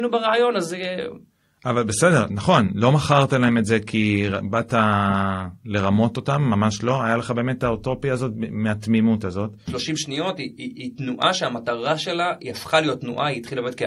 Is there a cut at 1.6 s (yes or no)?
no